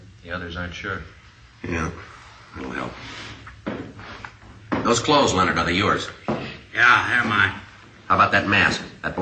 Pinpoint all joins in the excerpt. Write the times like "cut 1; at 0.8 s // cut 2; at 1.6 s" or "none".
cut 1; at 2.6 s